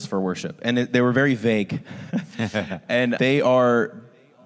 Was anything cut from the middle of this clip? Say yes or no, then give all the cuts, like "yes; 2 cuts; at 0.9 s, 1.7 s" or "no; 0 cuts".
yes; 1 cut; at 3.2 s